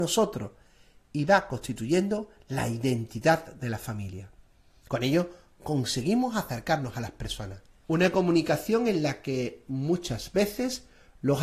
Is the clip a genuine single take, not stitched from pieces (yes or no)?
no